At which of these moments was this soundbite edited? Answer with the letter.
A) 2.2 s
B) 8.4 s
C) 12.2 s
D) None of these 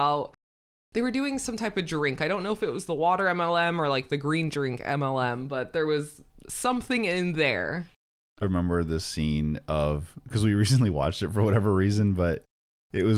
B